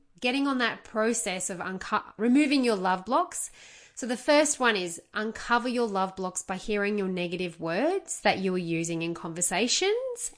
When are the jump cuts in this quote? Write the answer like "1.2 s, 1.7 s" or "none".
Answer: 2.2 s